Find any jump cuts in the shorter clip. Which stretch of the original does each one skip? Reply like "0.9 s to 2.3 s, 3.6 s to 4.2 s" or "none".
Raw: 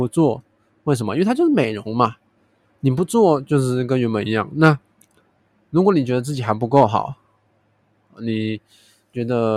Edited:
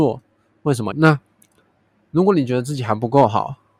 1.1 s to 4.5 s